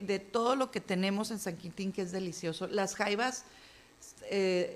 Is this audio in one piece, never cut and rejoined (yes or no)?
yes